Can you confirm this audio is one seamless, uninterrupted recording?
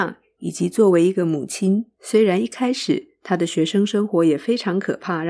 no; 1 cut; at 2.0 s

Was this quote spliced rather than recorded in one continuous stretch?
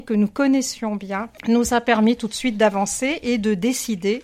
yes; 1 cut; at 1.4 s

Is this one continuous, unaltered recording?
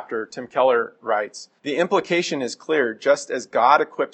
no; 1 cut; at 1.6 s

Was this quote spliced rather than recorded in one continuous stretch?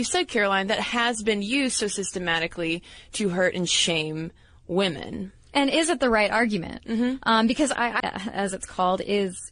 yes; 2 cuts; at 6.8 s, 8.0 s

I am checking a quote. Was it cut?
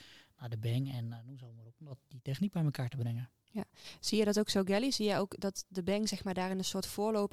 no; 0 cuts

